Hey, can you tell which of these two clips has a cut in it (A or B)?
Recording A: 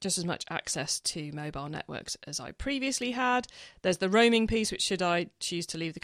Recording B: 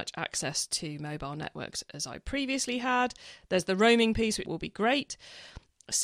B